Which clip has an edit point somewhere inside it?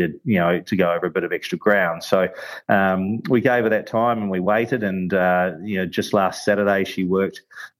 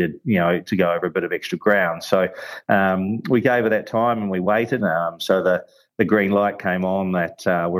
second; 1 cut; at 4.8 s

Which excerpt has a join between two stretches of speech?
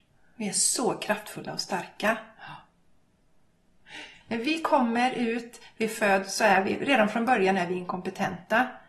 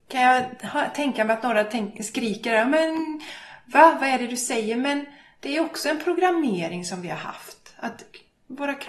first; 1 cut; at 4.2 s

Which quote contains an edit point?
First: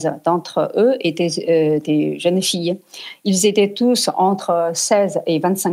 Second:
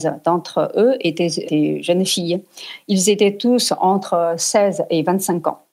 second; 1 cut; at 1.5 s

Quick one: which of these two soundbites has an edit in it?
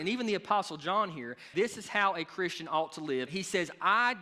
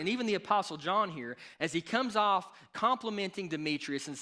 first; 2 cuts; at 1.5 s, 3.3 s

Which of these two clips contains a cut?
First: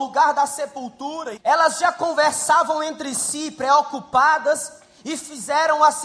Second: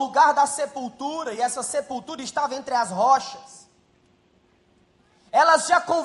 first; 1 cut; at 1.4 s

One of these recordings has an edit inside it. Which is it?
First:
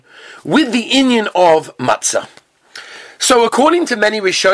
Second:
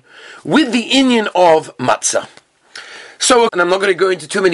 second; 1 cut; at 3.5 s

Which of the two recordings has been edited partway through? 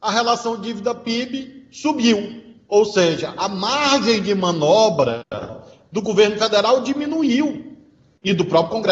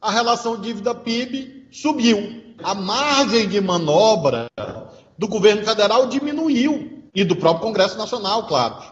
second; 2 cuts; at 2.6 s, 7.1 s

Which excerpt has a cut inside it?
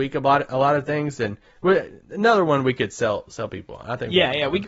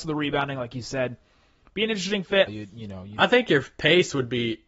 second; 1 cut; at 2.5 s

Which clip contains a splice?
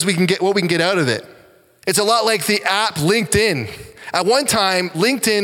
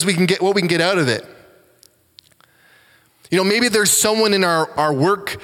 first; 1 cut; at 1.8 s

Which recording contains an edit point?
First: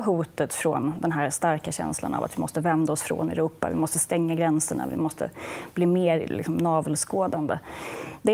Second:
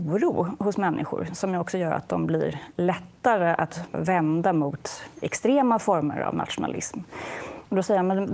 second; 1 cut; at 3.9 s

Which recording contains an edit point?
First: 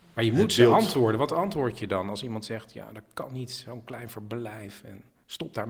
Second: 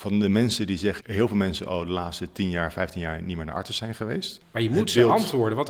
second; 2 cuts; at 1.0 s, 4.4 s

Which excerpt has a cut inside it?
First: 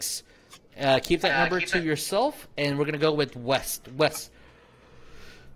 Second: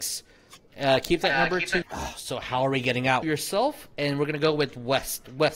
second; 2 cuts; at 1.8 s, 3.2 s

